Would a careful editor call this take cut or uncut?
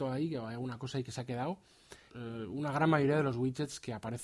cut